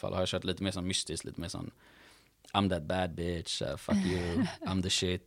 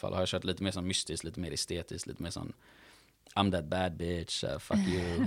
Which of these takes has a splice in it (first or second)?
first